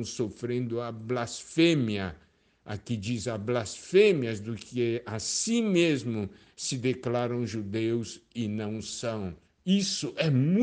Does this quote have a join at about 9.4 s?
yes; 1 cut; at 9.4 s

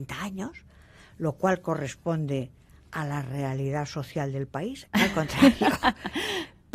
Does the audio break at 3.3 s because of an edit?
no; 1 cut; at 4.9 s

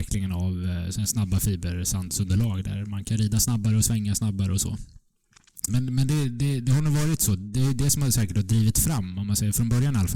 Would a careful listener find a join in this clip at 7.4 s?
no; 1 cut; at 5.7 s

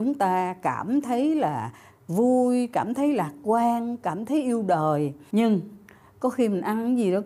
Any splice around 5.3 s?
no; 0 cuts

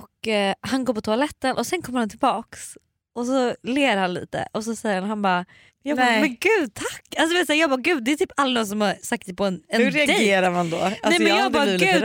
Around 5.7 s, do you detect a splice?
yes; 1 cut; at 5.7 s

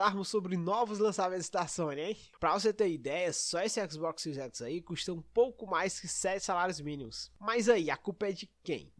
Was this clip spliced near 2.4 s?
yes; 1 cut; at 2.4 s

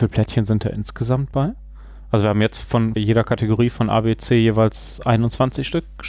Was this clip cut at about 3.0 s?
yes; 1 cut; at 3.0 s

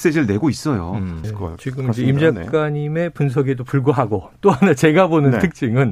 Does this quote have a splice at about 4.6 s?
no; 1 cut; at 1.2 s

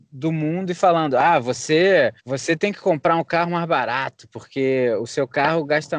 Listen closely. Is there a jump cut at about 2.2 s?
yes; 1 cut; at 2.2 s

